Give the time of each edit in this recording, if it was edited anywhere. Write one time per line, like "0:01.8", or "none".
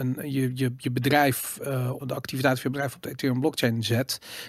0:02.0